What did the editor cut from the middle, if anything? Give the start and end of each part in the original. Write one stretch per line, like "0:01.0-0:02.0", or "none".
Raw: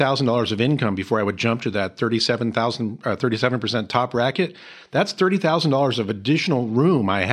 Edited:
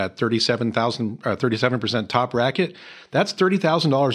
none